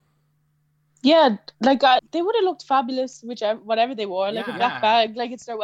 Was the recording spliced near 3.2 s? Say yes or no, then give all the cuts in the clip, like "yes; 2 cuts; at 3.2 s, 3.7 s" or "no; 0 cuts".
no; 1 cut; at 2.0 s